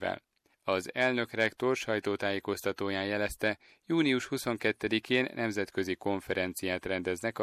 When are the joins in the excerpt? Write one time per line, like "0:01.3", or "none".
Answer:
none

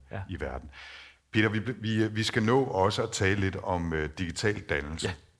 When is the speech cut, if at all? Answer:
none

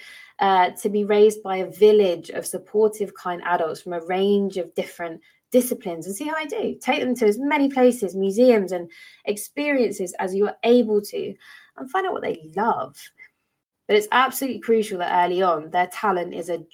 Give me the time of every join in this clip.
0:13.7

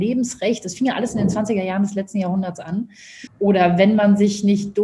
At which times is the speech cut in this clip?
0:03.3

